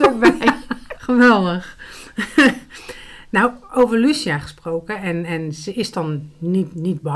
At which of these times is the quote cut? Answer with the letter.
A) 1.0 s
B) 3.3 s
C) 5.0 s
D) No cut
A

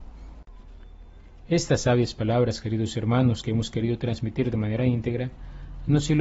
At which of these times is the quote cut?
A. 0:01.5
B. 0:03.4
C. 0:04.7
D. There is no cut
D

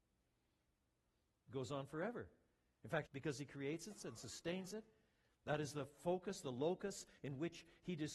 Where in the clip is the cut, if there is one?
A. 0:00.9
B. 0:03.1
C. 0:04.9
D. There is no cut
B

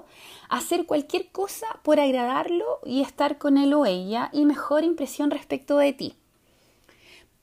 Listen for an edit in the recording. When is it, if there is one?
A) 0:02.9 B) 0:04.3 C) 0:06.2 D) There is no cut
B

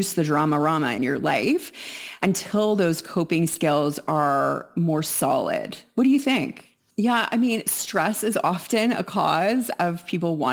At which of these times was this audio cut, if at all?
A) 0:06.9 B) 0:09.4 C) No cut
A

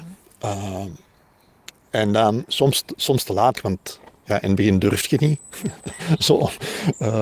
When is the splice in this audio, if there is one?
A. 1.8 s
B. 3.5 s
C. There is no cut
B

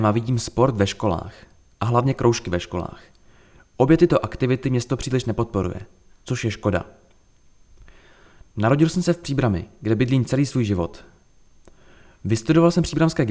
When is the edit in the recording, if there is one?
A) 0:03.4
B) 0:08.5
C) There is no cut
C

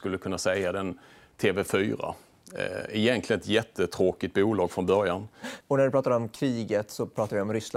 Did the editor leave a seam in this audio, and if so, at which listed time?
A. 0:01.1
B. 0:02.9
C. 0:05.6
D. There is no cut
C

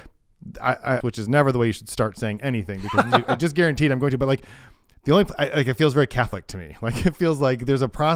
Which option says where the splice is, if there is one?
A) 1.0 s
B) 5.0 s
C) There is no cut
A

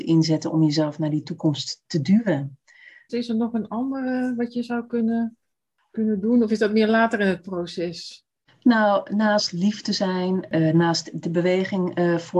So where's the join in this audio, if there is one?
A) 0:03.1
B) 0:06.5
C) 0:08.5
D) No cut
A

